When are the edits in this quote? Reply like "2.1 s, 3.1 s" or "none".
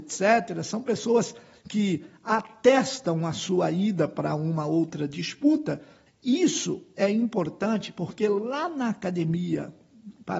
6.1 s